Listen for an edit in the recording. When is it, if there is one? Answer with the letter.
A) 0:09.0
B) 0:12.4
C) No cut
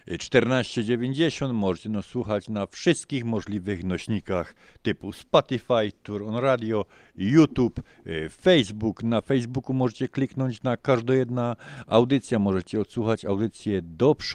C